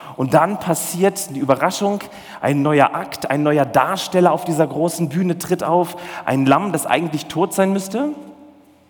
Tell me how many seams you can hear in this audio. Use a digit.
0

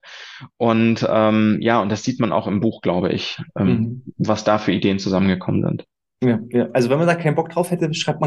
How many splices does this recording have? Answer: 0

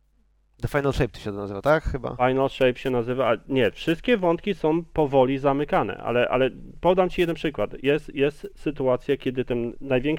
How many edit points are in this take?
0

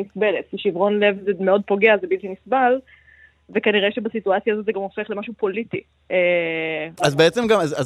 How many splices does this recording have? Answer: 1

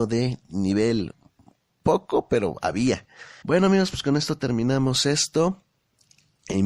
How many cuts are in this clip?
1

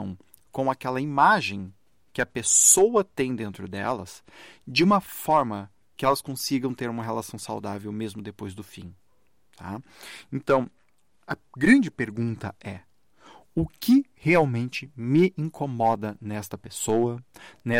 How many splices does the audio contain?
0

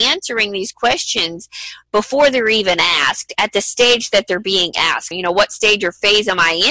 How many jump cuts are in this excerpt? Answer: 1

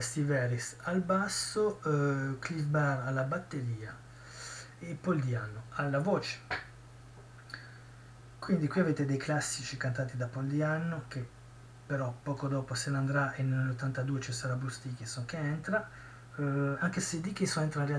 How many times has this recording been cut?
0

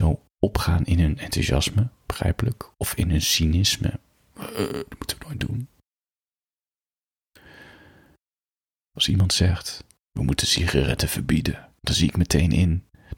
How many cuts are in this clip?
0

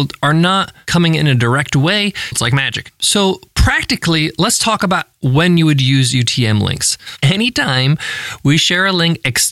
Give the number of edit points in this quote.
2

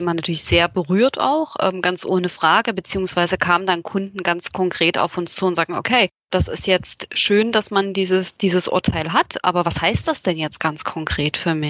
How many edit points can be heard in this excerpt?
0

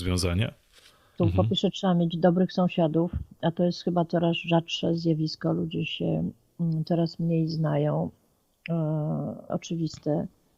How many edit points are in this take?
2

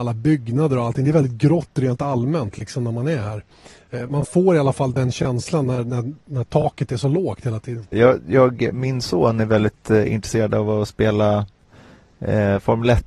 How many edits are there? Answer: 1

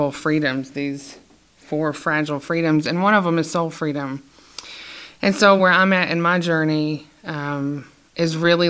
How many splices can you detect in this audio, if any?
0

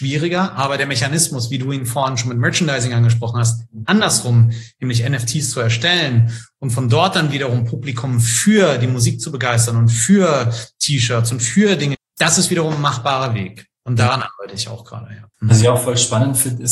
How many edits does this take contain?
2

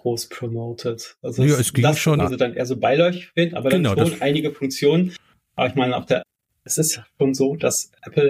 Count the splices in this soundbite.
1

